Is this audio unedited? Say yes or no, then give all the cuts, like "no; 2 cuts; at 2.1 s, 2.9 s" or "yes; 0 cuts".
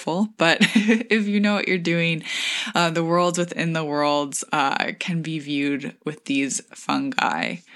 yes; 0 cuts